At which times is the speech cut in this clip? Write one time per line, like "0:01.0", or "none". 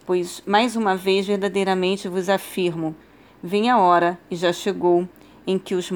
none